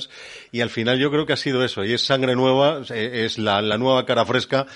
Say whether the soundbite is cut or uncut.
uncut